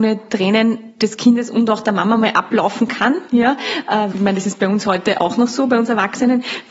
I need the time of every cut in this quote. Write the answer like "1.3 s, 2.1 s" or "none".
4.1 s